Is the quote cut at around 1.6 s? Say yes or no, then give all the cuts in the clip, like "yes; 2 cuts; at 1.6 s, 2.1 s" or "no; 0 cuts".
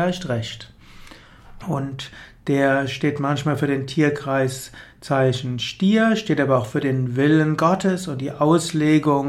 yes; 1 cut; at 1.6 s